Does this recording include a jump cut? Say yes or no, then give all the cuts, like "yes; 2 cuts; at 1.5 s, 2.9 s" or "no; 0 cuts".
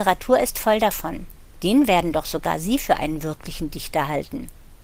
yes; 1 cut; at 1.6 s